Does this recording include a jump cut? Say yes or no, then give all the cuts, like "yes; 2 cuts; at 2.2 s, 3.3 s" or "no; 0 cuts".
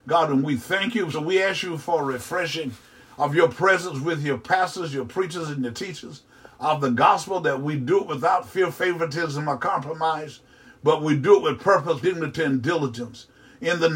yes; 2 cuts; at 1.1 s, 12.0 s